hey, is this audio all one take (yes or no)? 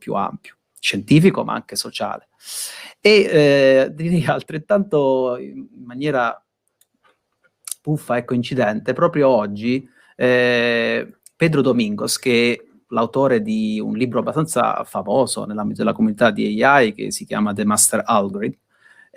yes